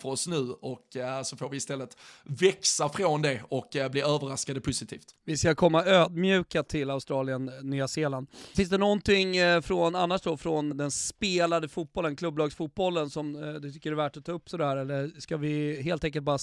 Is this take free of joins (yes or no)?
no